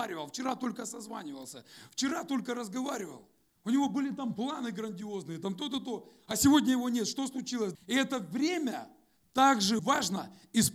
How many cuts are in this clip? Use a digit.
2